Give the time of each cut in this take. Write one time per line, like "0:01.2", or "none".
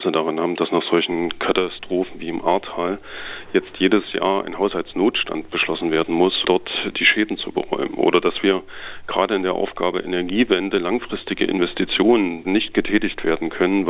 0:06.4
0:12.4